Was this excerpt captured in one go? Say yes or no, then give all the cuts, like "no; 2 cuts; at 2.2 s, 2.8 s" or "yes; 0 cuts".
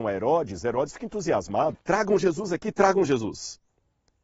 no; 1 cut; at 1.8 s